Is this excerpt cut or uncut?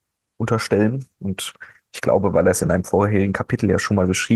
uncut